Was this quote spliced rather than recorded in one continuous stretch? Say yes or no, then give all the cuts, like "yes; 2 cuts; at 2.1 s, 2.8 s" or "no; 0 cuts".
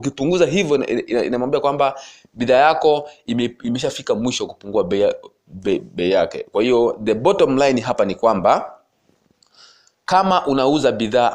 no; 0 cuts